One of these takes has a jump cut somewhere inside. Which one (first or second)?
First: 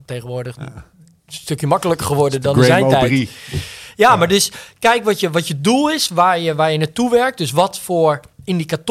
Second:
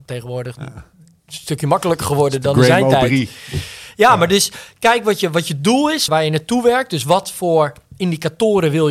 second